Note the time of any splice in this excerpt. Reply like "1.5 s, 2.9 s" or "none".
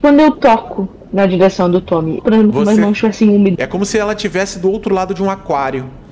2.2 s, 3.5 s